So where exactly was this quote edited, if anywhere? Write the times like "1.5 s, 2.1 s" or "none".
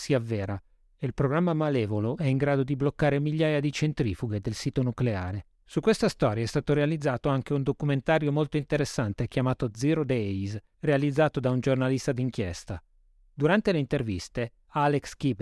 5.6 s